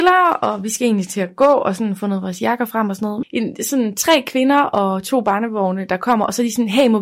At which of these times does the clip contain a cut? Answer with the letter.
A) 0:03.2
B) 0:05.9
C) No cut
A